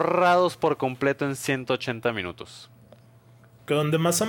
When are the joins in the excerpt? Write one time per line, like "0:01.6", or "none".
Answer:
none

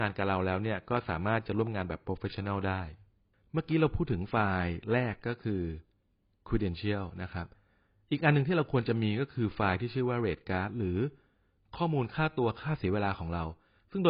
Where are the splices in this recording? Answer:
none

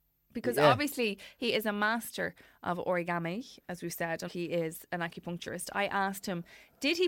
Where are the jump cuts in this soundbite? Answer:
0:04.3

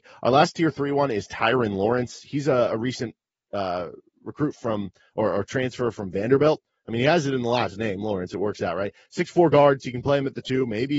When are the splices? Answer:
none

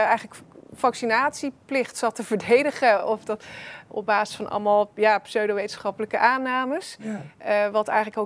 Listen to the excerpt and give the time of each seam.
none

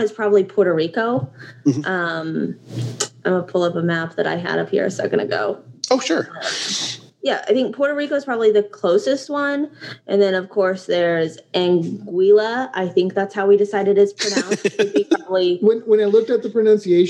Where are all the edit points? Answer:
none

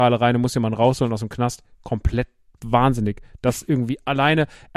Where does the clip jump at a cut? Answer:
none

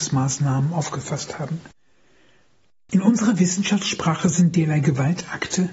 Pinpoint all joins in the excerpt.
none

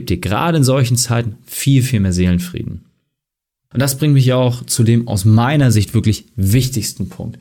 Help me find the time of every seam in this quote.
none

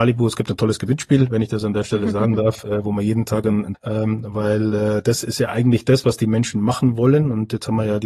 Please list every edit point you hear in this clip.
0:03.7

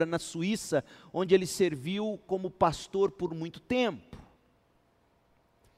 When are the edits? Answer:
none

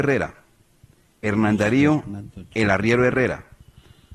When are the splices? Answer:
0:02.5

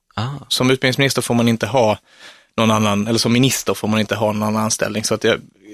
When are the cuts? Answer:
none

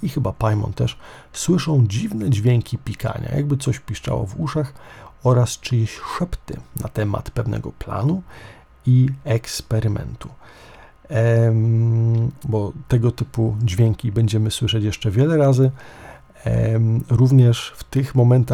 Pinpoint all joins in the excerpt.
0:12.4

